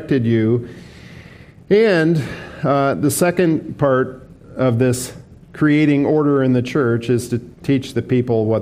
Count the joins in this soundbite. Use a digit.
0